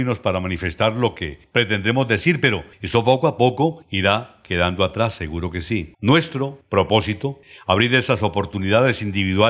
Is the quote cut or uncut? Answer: cut